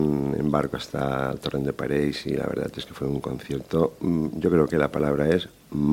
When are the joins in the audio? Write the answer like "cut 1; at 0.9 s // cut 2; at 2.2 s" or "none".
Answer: none